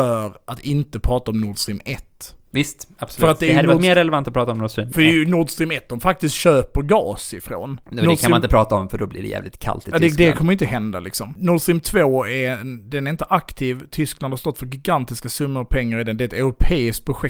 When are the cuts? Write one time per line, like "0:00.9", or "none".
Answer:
0:11.4